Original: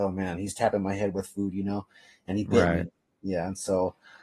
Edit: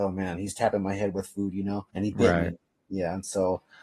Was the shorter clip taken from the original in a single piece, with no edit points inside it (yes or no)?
no